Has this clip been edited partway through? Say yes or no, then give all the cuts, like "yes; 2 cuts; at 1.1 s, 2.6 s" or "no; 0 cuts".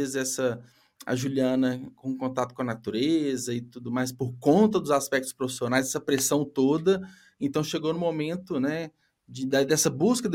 no; 0 cuts